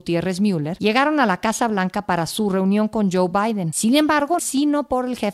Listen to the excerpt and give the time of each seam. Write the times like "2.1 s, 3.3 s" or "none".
4.4 s